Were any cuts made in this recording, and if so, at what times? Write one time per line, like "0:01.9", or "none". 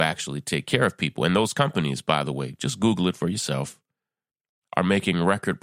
none